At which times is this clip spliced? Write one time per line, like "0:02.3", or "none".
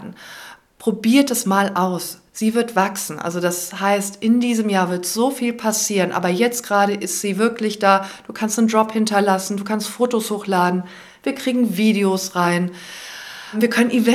none